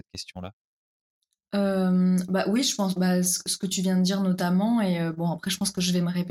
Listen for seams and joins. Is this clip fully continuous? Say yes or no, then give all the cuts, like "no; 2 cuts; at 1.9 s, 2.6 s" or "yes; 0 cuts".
yes; 0 cuts